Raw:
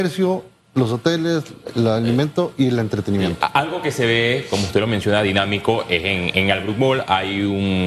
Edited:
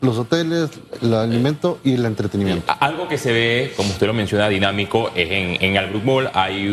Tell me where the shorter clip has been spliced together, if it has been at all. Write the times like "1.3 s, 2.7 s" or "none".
none